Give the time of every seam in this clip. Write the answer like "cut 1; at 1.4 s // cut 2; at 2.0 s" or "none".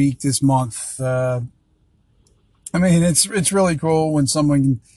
none